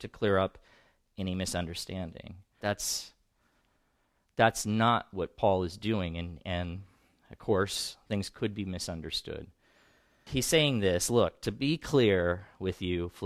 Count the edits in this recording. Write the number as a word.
two